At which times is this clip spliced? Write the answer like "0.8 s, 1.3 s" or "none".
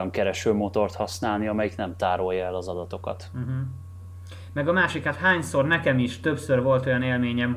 none